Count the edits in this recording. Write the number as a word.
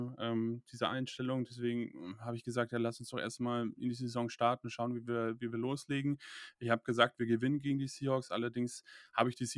zero